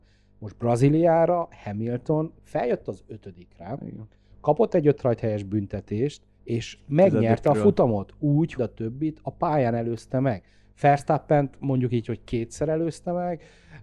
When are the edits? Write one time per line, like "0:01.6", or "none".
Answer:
0:02.4
0:06.4
0:08.6